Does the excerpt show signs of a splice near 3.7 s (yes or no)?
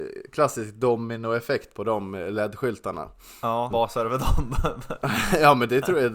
yes